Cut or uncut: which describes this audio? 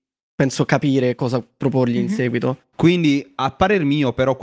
cut